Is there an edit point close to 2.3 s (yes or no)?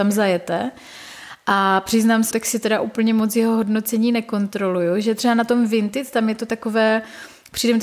yes